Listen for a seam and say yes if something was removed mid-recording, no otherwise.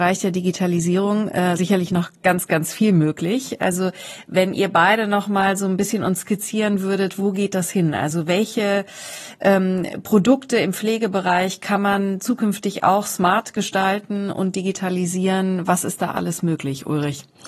no